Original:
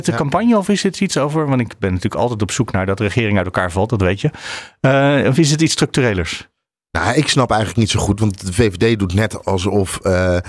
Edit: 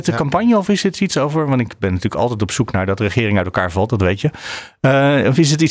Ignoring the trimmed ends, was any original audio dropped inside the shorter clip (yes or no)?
no